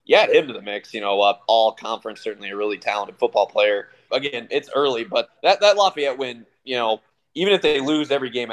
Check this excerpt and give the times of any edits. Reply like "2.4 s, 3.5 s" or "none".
2.2 s, 4.1 s, 5.3 s